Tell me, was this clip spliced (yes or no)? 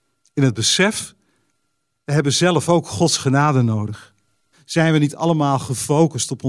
yes